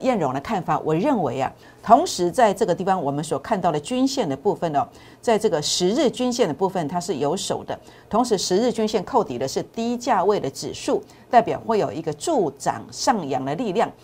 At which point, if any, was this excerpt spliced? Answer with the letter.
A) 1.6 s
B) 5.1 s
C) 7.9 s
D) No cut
A